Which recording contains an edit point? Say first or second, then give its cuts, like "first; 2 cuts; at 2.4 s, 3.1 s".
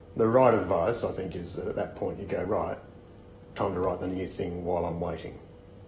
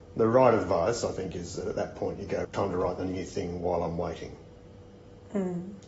second; 1 cut; at 2.4 s